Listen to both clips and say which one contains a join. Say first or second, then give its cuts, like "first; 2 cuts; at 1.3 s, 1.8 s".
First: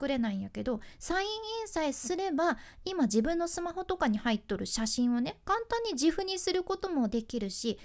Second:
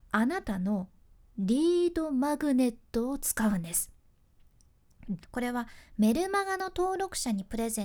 second; 1 cut; at 5.2 s